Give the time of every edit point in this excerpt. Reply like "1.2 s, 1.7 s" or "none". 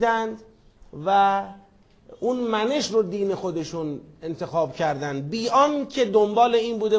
none

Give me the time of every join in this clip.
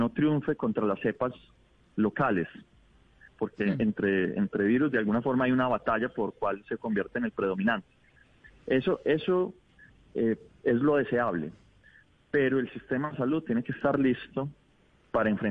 none

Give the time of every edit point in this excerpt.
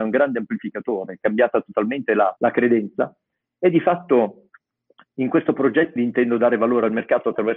2.4 s, 6.0 s

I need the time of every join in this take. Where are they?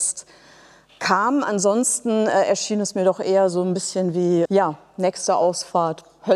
4.5 s

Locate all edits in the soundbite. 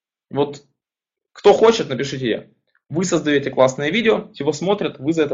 none

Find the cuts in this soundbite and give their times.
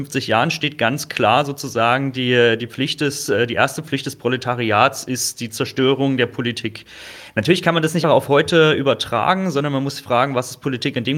8.0 s

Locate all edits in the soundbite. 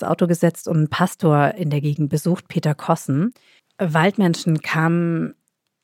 3.6 s

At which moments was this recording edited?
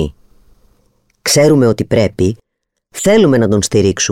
none

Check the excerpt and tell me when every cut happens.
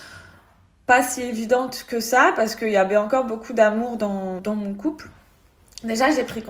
4.4 s

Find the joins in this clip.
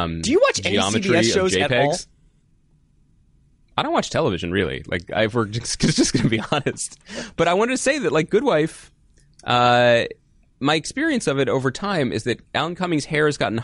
none

